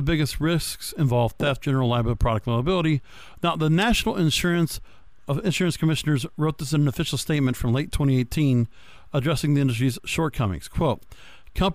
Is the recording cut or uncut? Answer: cut